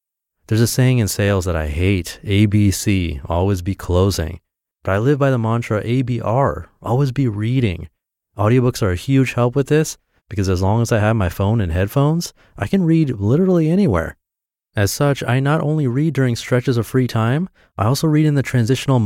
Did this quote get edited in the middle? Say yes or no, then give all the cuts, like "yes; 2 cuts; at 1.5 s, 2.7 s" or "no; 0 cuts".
no; 0 cuts